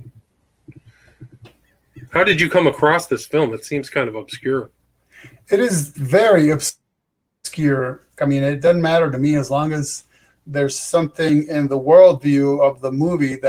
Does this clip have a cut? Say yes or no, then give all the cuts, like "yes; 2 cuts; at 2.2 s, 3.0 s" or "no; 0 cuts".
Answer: yes; 1 cut; at 8.2 s